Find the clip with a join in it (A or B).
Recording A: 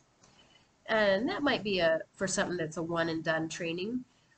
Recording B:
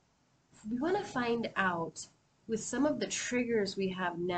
A